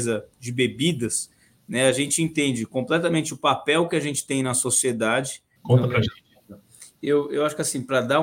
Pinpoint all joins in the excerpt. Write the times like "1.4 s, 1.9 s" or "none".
5.6 s